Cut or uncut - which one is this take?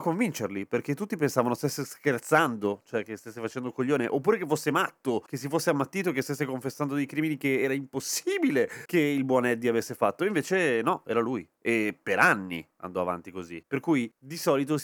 uncut